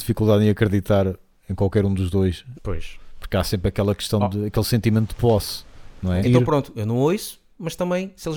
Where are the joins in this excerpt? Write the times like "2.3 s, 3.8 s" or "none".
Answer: 2.5 s, 6.2 s